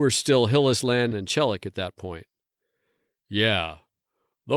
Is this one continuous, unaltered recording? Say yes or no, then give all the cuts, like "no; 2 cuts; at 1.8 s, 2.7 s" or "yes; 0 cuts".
no; 1 cut; at 1.1 s